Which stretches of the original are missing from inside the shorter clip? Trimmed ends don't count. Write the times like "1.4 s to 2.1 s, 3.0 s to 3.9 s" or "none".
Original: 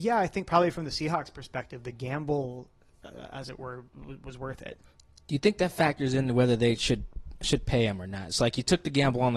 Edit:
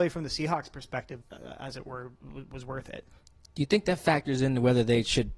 1.8 s to 2.9 s